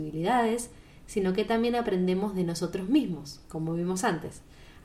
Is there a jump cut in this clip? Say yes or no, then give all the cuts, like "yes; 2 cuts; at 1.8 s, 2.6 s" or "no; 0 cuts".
no; 0 cuts